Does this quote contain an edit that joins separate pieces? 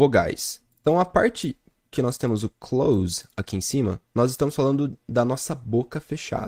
no; 0 cuts

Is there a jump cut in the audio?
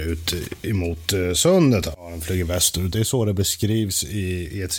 no; 0 cuts

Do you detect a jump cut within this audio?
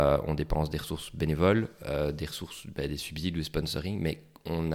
no; 0 cuts

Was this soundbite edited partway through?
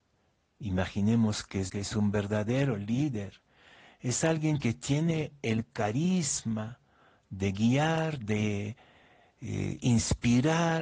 yes; 1 cut; at 1.7 s

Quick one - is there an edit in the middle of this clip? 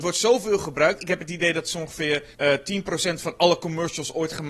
yes; 1 cut; at 2.3 s

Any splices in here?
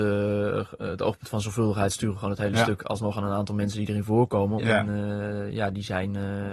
yes; 1 cut; at 4.6 s

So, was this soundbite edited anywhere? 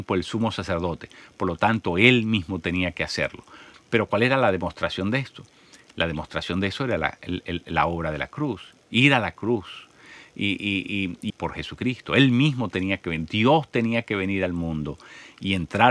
yes; 2 cuts; at 3.7 s, 11.3 s

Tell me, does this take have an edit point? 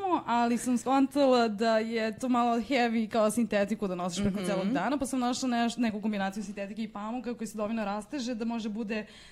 no; 0 cuts

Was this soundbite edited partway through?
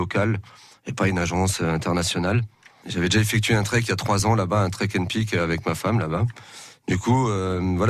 no; 0 cuts

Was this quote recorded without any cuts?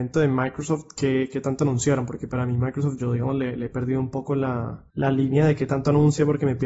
no; 1 cut; at 4.9 s

